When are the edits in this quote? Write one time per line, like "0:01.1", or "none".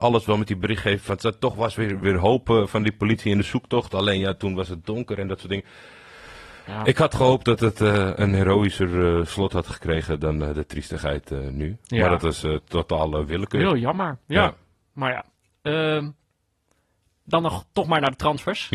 0:02.0